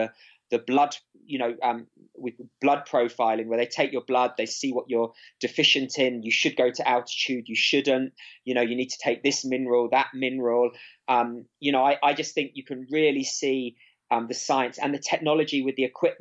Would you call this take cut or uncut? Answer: uncut